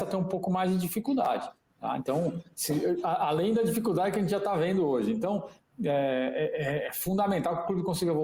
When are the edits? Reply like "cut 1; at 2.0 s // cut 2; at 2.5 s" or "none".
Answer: none